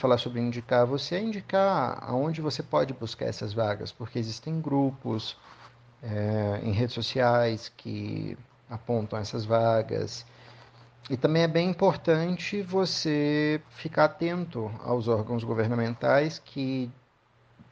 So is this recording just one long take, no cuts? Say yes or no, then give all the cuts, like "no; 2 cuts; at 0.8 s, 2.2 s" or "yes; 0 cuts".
yes; 0 cuts